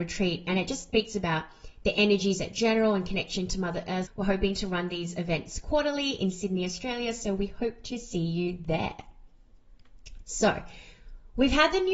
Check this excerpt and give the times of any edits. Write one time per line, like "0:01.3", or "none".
0:04.0